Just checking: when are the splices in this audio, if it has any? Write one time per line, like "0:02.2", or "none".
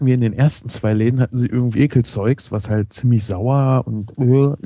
0:01.7